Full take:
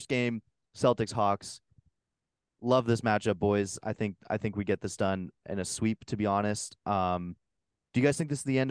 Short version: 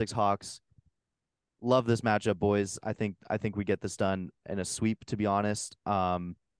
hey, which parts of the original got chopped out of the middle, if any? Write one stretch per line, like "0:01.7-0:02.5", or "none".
none